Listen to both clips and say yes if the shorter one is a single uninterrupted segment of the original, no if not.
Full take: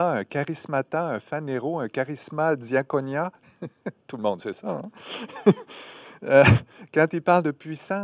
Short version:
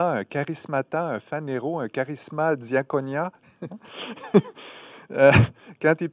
no